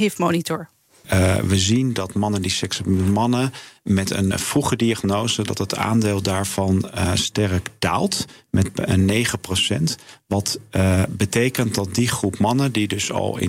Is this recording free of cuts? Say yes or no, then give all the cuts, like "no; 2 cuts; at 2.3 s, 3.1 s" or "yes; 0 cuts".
no; 1 cut; at 4.3 s